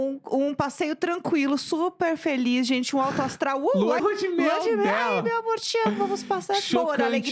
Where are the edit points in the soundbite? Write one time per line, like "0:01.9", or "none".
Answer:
0:04.0

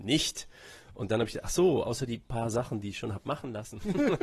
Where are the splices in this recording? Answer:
none

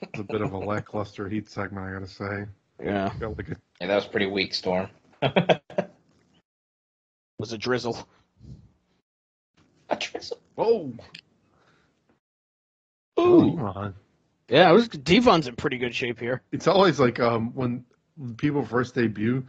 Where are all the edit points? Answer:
0:03.8

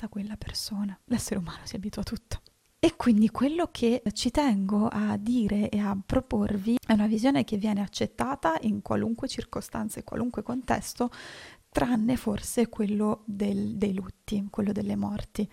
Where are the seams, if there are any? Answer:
0:01.0

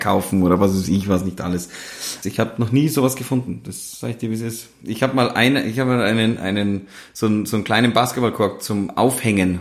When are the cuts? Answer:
0:02.2

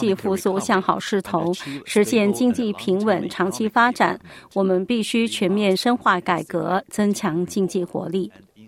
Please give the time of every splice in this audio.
none

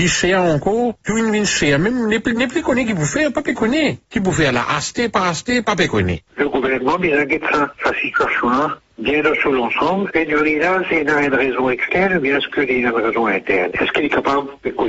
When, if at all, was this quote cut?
0:06.3

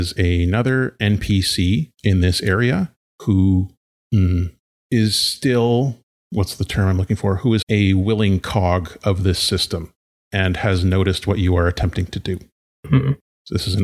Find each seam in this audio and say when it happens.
0:07.6

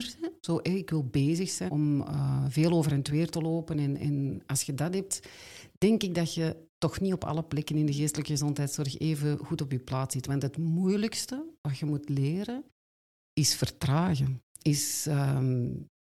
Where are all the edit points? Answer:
0:01.7

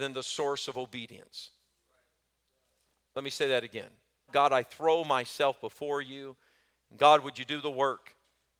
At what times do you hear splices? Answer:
0:04.3

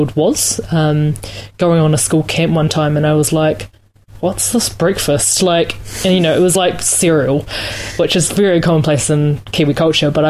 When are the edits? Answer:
none

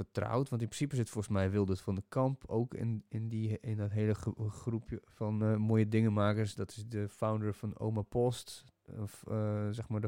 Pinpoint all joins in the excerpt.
none

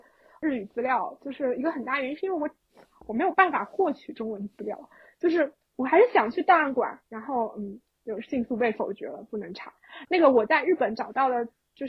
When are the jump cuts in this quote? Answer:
0:07.0
0:10.0

